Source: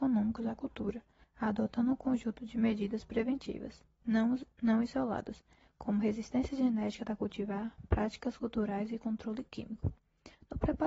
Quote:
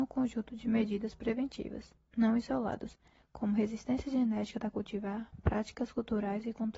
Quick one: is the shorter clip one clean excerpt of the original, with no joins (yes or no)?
no